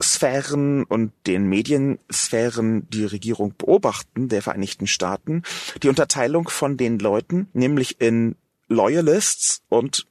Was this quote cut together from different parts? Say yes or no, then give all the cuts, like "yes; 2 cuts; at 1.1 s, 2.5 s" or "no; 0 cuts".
yes; 1 cut; at 2.9 s